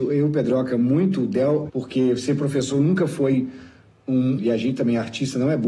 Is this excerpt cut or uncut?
cut